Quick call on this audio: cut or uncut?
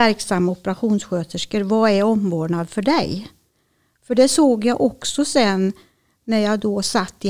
uncut